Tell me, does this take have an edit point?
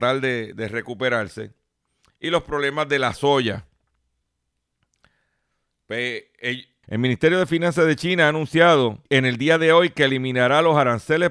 yes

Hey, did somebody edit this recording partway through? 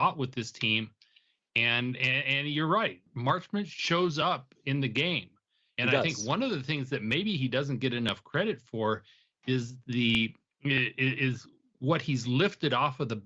no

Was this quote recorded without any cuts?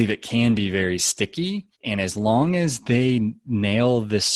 no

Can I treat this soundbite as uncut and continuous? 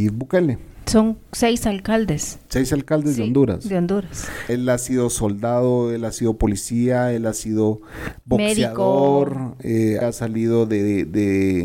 no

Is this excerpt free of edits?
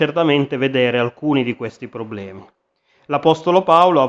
yes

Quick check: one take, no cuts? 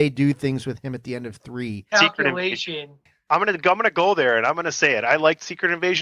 no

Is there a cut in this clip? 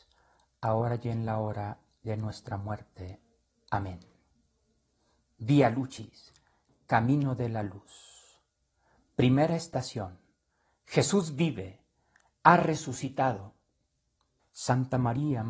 yes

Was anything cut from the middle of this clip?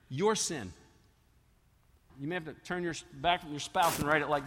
yes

